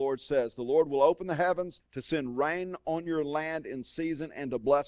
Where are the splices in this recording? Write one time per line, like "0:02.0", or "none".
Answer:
0:01.8